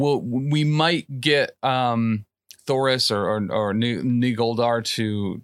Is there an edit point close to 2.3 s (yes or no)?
no